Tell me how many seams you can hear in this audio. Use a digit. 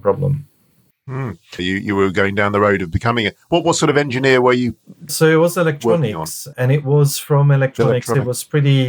3